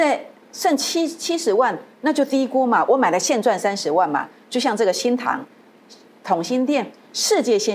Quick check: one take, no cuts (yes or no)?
yes